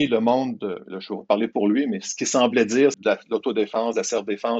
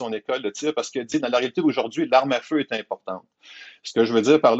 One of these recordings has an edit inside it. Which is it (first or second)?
first